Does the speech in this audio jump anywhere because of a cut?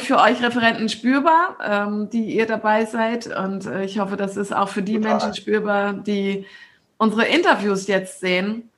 no; 0 cuts

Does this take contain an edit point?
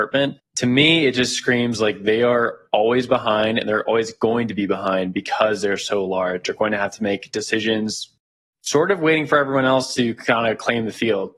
no; 0 cuts

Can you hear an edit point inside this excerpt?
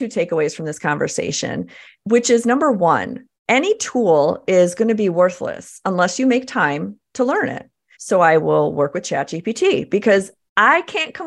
yes; 2 cuts; at 3.4 s, 7.9 s

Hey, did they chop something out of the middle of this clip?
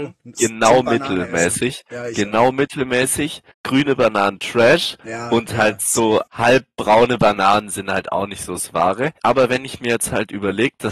yes; 3 cuts; at 3.5 s, 6.3 s, 9.2 s

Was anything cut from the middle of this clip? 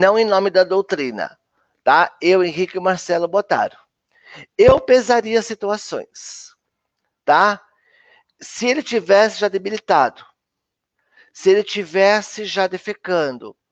no; 0 cuts

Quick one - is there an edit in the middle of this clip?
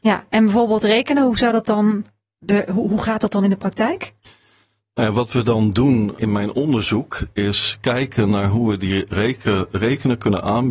yes; 2 cuts; at 6.2 s, 9.1 s

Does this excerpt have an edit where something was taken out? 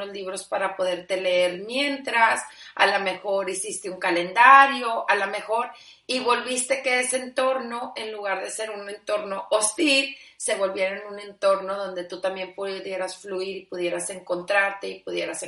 no; 0 cuts

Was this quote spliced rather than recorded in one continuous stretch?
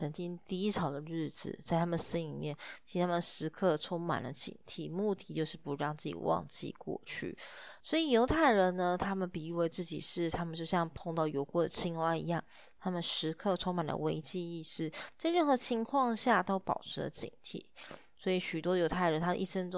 yes; 1 cut; at 7.8 s

